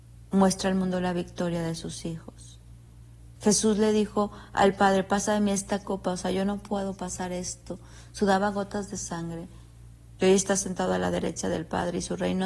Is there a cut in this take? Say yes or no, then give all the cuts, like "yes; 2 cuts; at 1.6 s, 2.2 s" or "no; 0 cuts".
yes; 1 cut; at 10.2 s